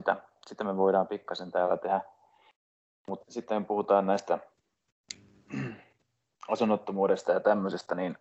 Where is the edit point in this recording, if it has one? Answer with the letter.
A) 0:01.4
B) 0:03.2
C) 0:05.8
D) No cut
B